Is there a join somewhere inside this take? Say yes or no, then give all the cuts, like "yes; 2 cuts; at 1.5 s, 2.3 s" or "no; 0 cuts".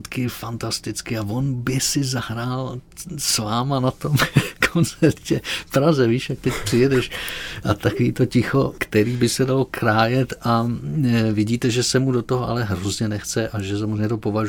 no; 0 cuts